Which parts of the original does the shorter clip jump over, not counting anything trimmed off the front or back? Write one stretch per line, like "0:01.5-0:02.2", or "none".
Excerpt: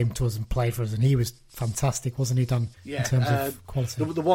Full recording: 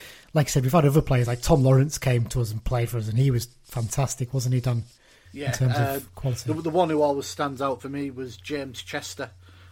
0:04.9-0:05.2

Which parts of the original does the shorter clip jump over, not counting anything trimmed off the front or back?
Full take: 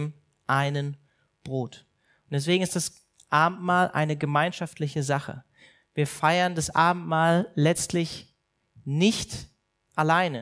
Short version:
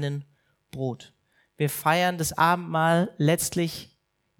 0:02.1-0:05.8

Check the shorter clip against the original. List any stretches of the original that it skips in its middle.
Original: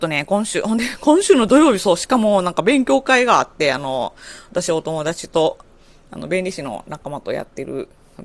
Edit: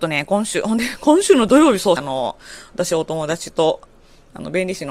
0:02.0-0:03.7

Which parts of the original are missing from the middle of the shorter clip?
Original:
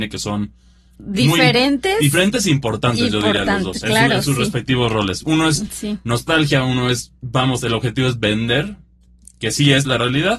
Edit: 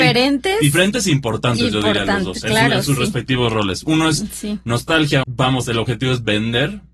0:06.6-0:07.2

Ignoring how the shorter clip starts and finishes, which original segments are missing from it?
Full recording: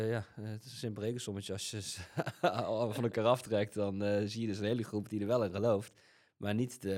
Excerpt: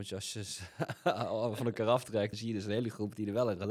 0:03.7-0:04.3

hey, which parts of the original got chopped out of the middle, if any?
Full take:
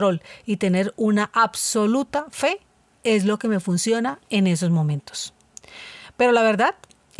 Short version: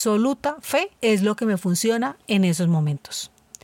0:02.6-0:03.0

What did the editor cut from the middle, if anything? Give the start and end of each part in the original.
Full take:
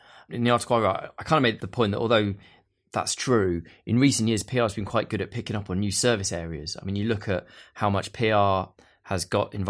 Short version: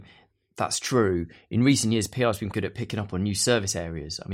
0:04.9-0:05.1

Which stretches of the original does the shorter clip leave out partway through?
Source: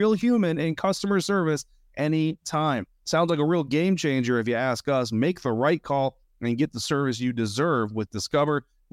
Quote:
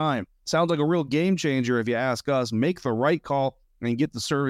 none

